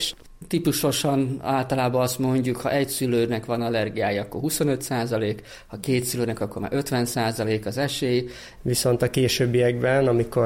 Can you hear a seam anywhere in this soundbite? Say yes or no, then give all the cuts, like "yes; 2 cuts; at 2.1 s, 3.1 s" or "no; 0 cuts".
yes; 1 cut; at 8.6 s